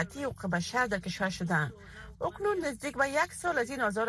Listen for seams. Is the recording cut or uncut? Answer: cut